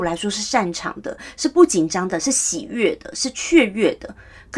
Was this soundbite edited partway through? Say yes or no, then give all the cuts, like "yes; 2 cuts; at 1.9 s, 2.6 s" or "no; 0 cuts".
no; 0 cuts